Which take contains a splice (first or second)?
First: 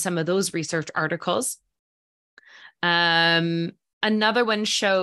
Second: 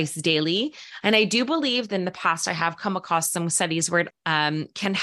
second